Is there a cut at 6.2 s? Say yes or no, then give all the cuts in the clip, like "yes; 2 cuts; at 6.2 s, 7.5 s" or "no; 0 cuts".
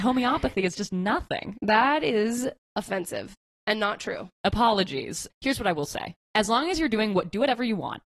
no; 1 cut; at 4.3 s